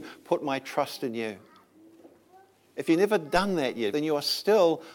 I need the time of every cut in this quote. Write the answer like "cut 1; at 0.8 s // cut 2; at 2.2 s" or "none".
cut 1; at 3.9 s